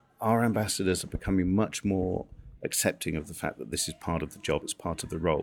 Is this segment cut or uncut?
uncut